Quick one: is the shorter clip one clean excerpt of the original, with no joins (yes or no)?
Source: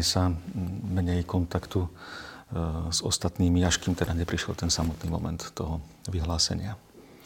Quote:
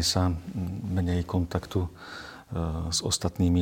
yes